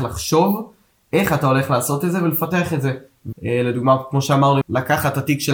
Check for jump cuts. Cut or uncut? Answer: cut